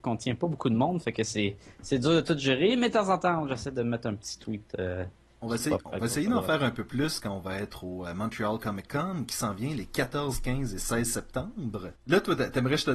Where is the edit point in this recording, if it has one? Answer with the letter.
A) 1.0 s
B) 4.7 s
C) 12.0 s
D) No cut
C